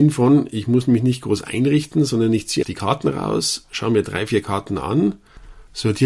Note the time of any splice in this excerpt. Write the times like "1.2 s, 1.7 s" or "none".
2.6 s